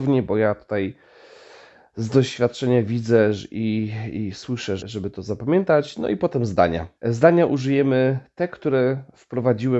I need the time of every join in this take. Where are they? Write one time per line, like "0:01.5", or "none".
0:04.8
0:07.0

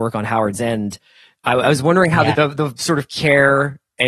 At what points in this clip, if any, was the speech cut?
0:02.3

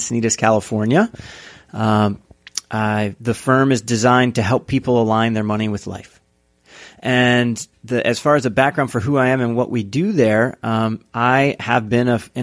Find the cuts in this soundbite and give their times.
none

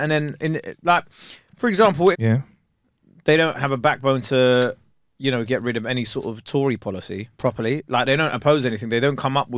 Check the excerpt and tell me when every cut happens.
0:02.1
0:07.3

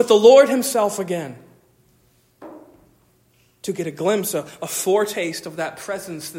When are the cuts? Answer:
none

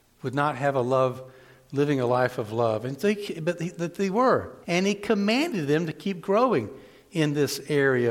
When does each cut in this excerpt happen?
0:04.6

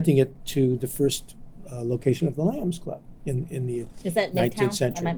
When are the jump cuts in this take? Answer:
none

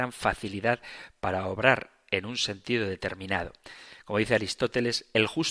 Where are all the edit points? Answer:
none

